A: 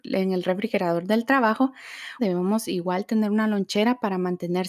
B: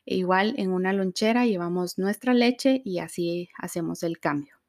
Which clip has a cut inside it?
A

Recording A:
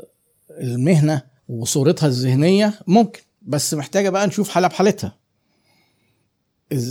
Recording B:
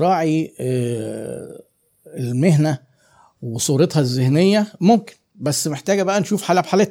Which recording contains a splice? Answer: A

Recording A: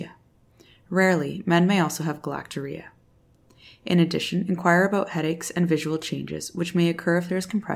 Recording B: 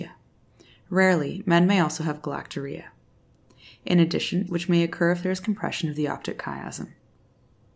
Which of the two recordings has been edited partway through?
B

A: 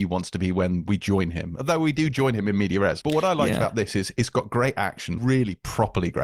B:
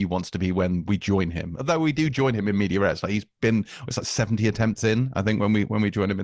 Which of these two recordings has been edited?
A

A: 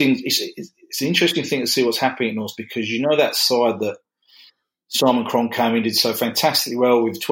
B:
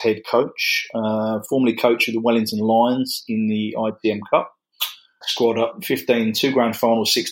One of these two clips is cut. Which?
B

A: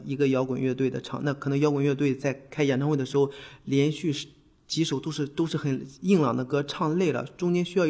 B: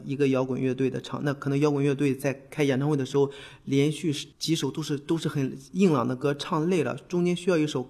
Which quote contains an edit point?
B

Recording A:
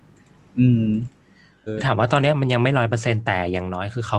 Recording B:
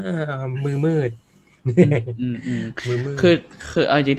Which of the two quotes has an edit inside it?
A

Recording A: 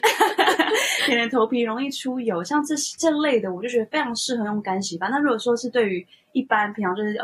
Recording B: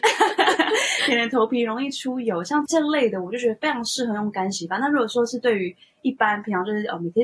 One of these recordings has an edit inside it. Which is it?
B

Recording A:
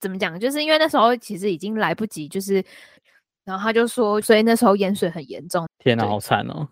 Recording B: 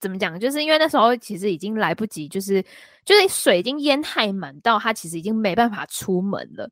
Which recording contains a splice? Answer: A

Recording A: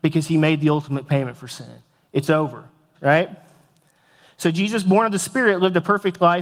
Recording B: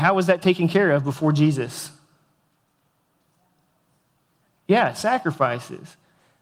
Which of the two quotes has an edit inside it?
A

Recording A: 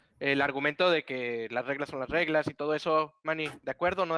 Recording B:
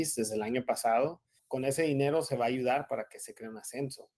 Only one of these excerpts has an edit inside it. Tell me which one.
B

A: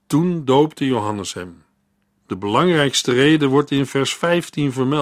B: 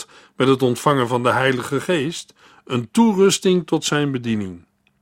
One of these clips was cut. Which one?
A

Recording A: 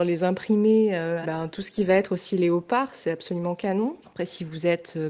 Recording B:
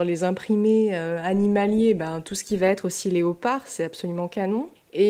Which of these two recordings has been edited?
A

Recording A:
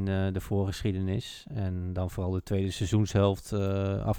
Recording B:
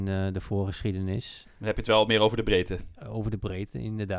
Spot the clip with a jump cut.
B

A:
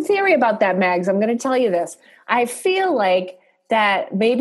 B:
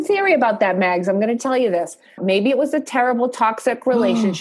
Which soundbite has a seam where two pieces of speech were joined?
B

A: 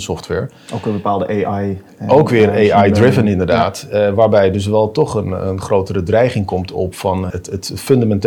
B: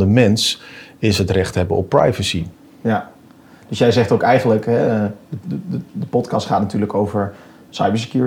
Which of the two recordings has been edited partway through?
A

